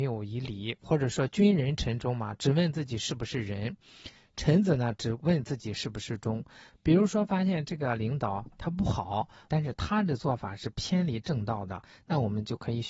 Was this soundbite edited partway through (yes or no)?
yes